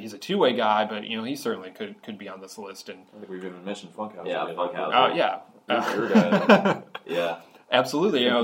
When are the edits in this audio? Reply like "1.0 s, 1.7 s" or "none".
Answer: none